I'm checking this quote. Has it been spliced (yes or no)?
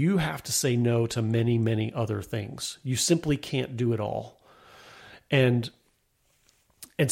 no